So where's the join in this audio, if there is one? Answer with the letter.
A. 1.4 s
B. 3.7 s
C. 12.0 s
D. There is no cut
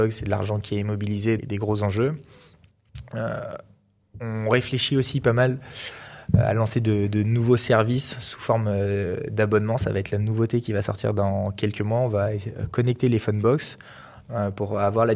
A